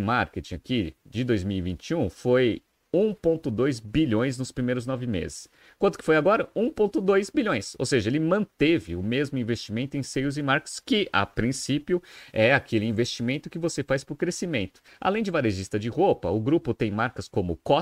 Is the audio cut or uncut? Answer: cut